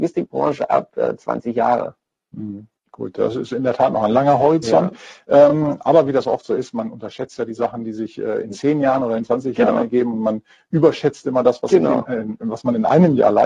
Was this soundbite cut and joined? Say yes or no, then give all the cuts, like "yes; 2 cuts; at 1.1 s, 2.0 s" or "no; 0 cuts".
no; 0 cuts